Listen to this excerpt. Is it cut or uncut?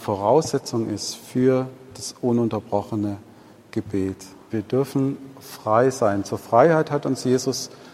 cut